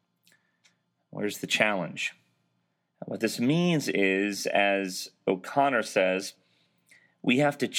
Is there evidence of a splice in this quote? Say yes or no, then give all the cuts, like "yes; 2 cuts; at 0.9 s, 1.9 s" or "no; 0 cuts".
yes; 1 cut; at 2.9 s